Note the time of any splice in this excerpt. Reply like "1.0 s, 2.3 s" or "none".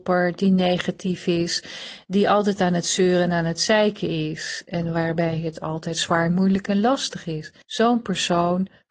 7.6 s